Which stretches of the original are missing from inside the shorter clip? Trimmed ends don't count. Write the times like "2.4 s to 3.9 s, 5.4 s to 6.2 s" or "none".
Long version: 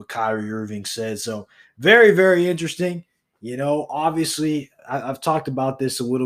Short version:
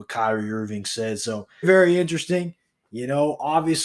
1.6 s to 2.1 s